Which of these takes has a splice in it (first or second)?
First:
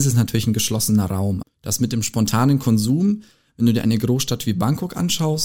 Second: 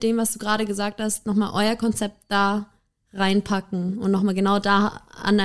first